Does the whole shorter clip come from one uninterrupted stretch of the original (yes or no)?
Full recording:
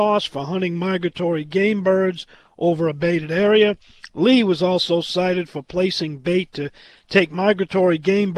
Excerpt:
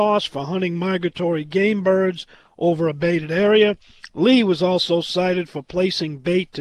yes